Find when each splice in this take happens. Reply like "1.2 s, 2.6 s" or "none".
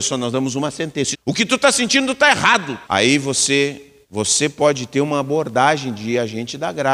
1.1 s, 2.8 s, 4.0 s